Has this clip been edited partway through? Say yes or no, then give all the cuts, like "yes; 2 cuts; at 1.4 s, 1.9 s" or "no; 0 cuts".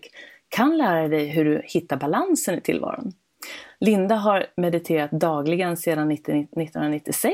no; 0 cuts